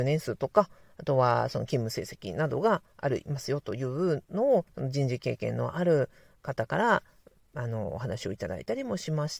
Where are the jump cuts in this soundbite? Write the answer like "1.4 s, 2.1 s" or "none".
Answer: none